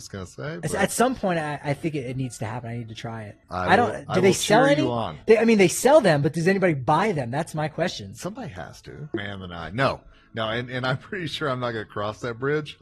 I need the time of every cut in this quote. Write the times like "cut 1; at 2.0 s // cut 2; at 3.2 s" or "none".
cut 1; at 3.4 s // cut 2; at 9.1 s